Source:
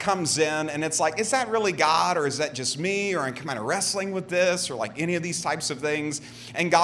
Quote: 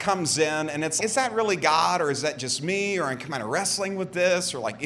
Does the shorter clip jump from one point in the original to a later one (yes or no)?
yes